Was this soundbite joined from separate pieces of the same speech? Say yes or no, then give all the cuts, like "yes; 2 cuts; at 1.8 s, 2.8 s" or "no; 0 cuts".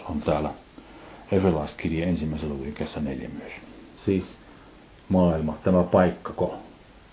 yes; 1 cut; at 4.0 s